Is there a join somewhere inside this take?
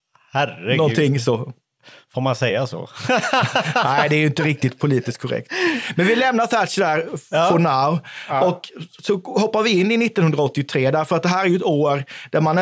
no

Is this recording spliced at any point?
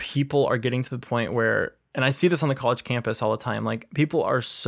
no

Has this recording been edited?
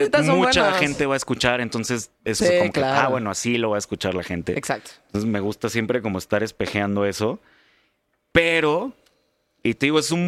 yes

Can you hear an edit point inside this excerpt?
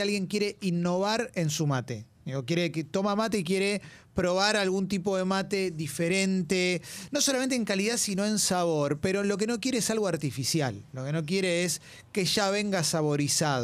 no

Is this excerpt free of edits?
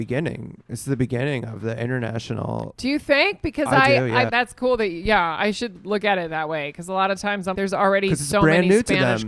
no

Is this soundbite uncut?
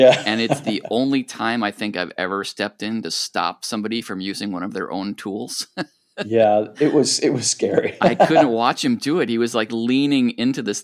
yes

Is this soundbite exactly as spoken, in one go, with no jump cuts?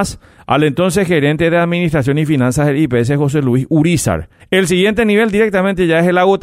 no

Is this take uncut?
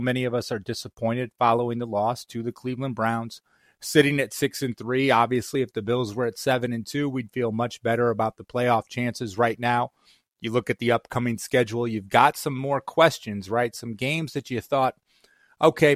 yes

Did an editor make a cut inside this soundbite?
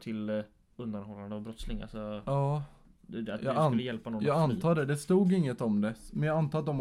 no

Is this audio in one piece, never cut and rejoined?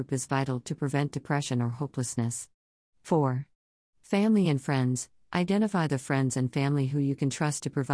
yes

